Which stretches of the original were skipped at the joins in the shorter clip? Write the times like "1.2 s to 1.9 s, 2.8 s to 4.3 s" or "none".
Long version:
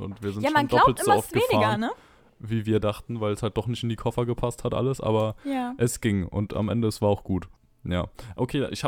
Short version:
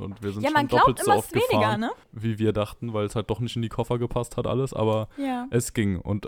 2.0 s to 2.3 s